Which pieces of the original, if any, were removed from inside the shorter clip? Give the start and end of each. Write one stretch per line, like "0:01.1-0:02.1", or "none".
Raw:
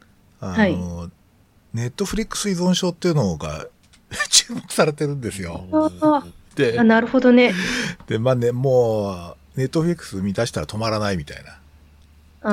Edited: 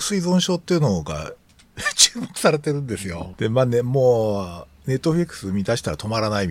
0:05.7-0:08.0